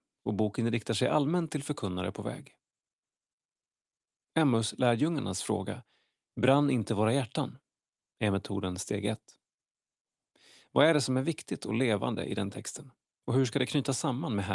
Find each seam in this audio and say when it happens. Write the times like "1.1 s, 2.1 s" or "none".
none